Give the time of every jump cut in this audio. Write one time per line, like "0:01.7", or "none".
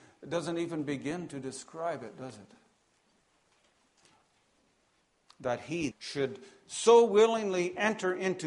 0:05.9